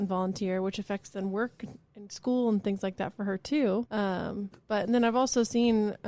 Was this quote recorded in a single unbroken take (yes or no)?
no